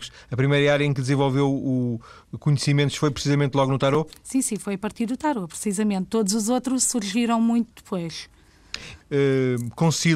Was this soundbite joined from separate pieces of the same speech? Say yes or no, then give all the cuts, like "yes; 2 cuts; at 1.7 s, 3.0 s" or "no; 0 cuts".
yes; 1 cut; at 9.0 s